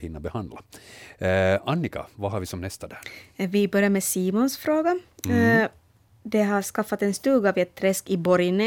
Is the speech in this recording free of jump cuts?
yes; 0 cuts

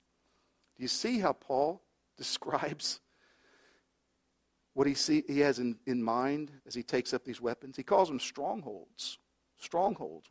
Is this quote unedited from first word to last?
no; 1 cut; at 6.6 s

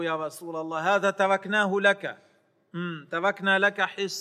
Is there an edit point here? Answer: no; 0 cuts

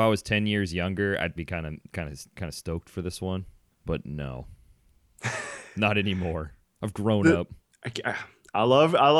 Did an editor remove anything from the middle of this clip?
yes; 2 cuts; at 1.4 s, 7.7 s

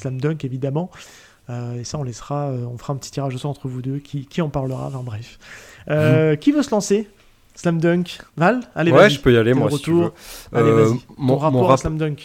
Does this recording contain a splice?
yes; 1 cut; at 8.3 s

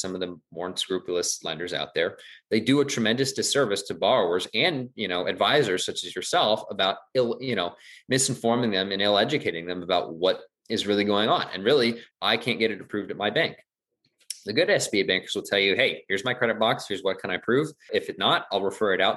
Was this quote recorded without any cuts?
no; 2 cuts; at 12.1 s, 17.9 s

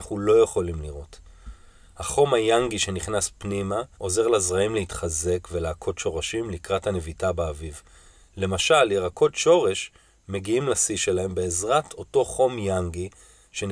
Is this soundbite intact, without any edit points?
no; 1 cut; at 3.9 s

